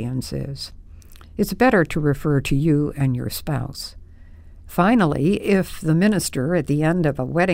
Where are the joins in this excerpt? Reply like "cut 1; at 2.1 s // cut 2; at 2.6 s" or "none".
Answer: cut 1; at 4.7 s